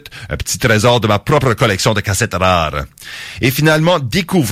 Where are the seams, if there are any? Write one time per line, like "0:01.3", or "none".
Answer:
none